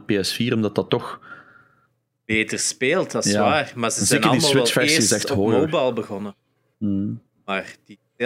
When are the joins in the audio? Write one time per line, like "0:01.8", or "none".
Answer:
0:06.7

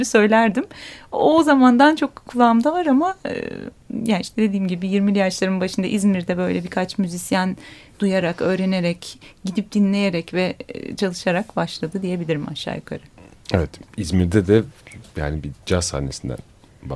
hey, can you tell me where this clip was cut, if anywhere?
none

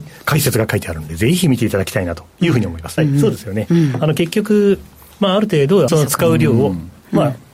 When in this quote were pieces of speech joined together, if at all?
0:03.0
0:05.9

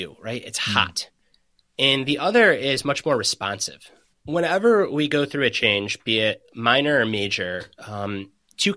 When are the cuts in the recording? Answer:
0:04.1

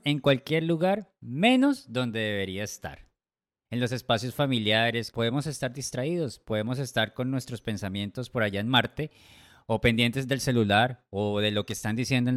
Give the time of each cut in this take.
0:03.7
0:05.1

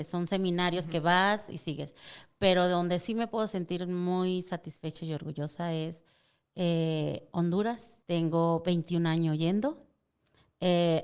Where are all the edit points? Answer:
none

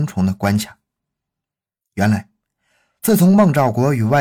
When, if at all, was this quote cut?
none

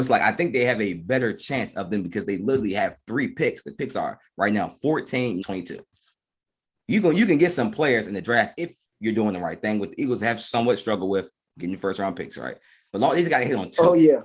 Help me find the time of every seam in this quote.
0:05.4

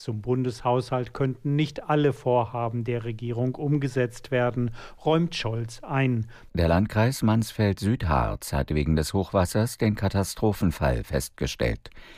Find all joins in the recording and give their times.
0:06.5

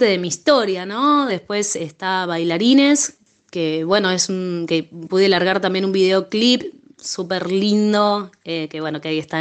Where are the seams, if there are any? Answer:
0:01.3

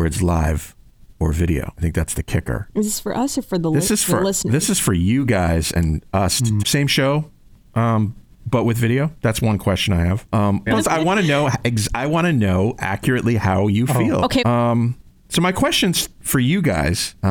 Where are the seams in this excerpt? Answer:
0:06.6
0:10.7
0:14.4

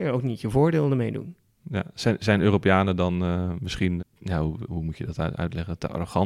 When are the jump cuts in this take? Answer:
0:04.0

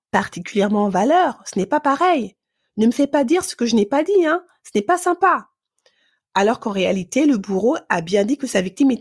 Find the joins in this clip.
none

